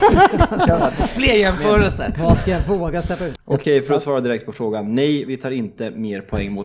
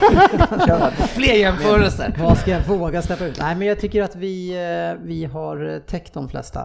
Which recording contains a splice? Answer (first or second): first